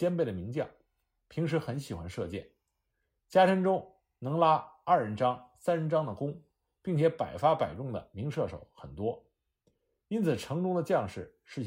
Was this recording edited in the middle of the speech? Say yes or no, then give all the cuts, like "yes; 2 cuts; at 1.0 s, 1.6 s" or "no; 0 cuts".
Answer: no; 0 cuts